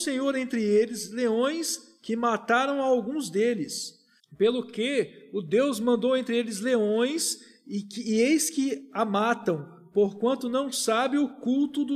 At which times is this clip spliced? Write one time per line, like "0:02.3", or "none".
0:04.2